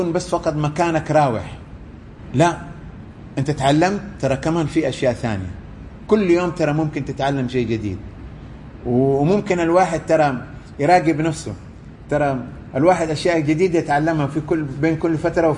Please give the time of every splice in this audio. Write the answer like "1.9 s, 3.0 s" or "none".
none